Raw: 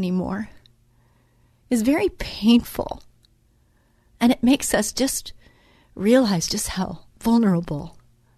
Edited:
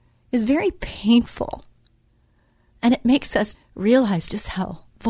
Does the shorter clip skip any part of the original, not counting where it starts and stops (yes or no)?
yes